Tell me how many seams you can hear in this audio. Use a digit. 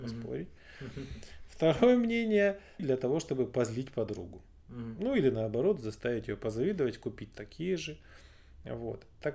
1